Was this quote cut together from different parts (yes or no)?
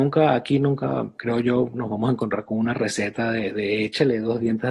no